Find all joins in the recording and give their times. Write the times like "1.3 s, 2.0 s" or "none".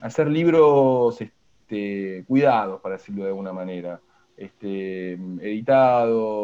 none